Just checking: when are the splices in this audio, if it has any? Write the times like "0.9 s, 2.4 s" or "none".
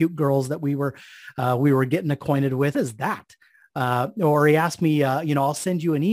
2.7 s